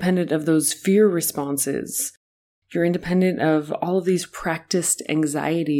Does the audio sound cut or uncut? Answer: uncut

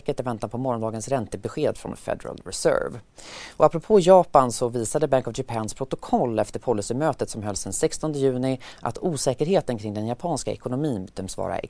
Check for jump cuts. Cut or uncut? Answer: uncut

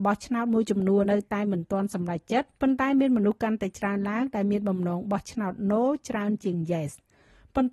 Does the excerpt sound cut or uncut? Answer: cut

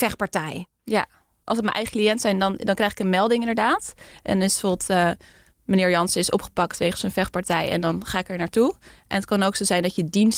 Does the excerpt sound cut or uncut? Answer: uncut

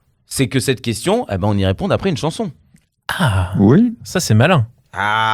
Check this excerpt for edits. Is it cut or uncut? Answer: uncut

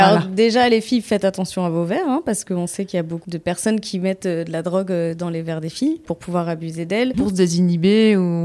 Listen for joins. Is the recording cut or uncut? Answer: cut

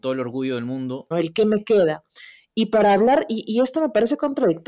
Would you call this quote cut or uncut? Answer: cut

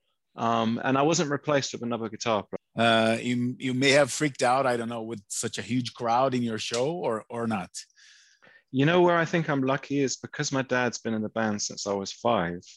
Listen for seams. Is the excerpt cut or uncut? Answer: cut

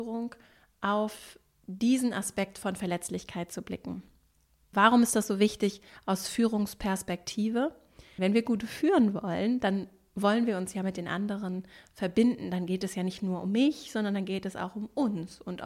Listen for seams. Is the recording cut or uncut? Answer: cut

